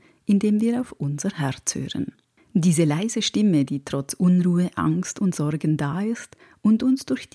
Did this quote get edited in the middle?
no; 0 cuts

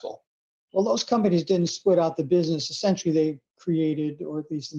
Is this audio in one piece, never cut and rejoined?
yes; 0 cuts

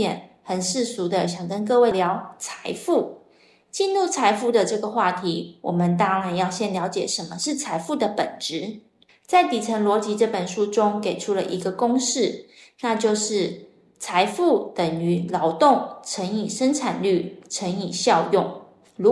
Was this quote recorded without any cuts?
no; 1 cut; at 1.9 s

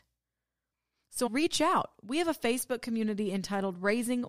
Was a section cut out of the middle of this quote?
yes; 1 cut; at 1.3 s

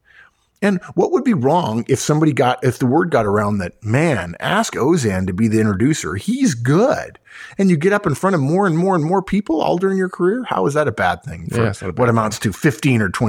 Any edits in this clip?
no; 0 cuts

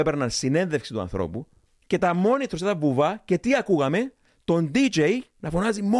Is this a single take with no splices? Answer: no; 1 cut; at 1.7 s

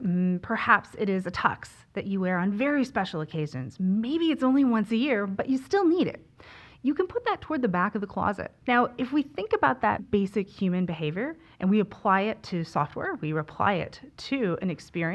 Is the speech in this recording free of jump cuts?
no; 2 cuts; at 8.6 s, 10.0 s

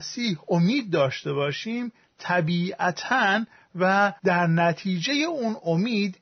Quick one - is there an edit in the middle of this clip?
yes; 1 cut; at 4.2 s

